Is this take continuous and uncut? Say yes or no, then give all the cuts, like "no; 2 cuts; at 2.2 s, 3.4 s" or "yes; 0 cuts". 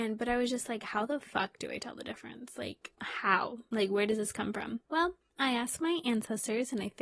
yes; 0 cuts